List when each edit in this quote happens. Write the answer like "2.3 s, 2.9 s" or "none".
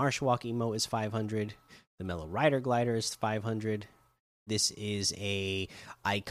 4.5 s